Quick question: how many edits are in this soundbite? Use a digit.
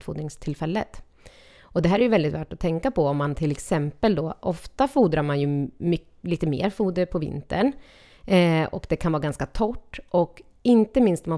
0